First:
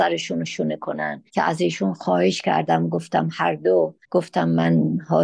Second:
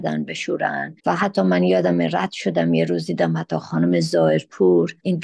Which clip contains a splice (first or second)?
first